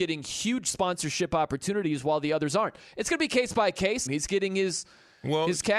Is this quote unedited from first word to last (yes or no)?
no